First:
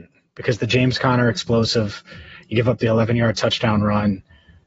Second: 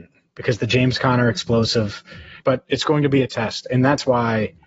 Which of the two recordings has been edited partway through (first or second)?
second